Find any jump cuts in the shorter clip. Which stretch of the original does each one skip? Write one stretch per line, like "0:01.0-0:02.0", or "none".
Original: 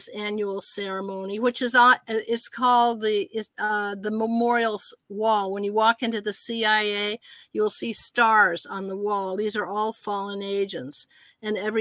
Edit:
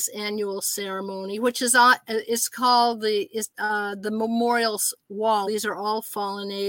0:05.5-0:09.4